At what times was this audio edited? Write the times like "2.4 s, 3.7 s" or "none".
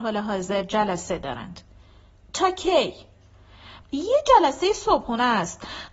3.8 s